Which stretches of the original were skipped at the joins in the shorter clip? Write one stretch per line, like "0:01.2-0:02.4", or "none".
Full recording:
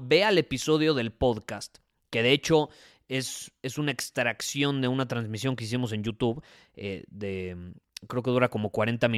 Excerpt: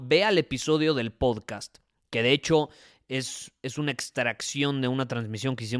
none